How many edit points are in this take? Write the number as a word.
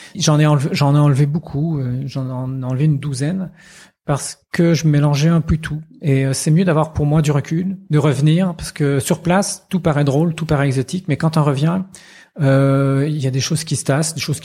zero